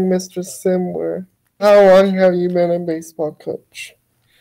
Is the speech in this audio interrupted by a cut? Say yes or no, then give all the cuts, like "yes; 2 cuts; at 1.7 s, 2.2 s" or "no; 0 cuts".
no; 0 cuts